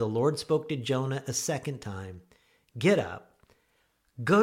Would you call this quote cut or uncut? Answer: uncut